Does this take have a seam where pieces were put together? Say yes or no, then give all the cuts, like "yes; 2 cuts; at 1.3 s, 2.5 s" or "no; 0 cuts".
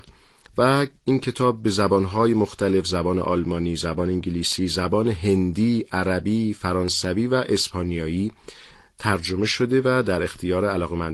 no; 0 cuts